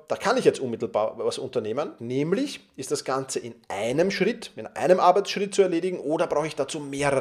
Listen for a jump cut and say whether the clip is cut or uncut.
cut